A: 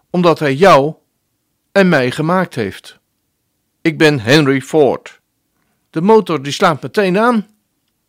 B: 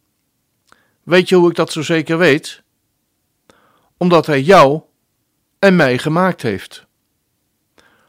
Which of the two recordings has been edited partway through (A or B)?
A